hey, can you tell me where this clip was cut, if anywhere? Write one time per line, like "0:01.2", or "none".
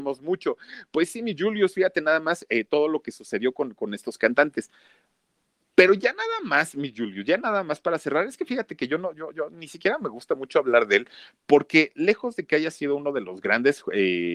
none

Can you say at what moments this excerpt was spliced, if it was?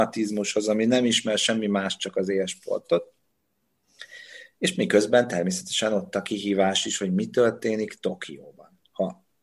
none

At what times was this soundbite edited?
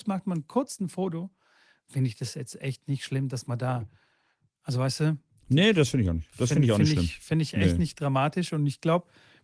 none

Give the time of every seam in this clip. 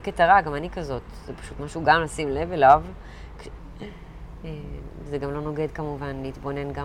0:03.6

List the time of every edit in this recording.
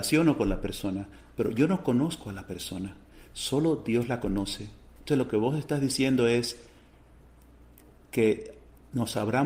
none

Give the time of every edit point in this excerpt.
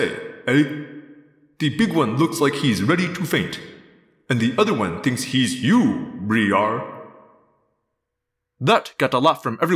none

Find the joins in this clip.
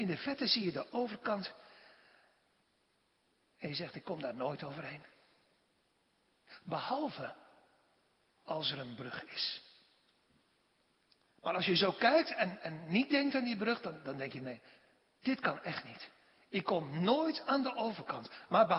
none

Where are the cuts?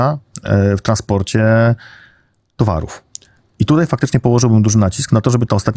none

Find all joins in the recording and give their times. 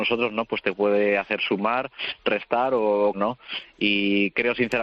0:03.1

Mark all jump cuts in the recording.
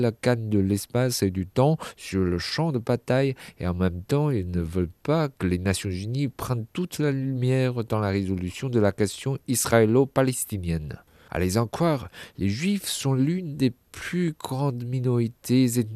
0:11.3

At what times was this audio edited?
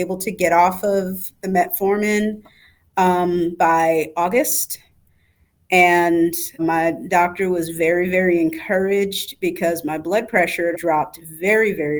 0:06.6
0:10.7

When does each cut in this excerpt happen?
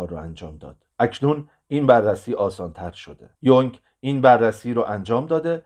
0:00.9
0:03.4

